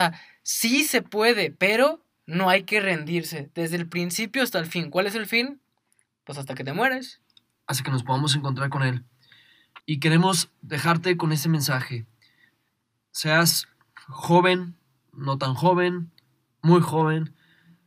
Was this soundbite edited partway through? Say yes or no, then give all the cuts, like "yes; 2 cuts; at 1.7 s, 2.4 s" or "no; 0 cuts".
yes; 1 cut; at 9.8 s